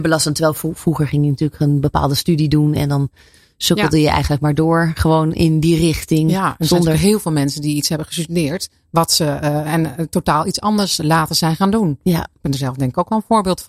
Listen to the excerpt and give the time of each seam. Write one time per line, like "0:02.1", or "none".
none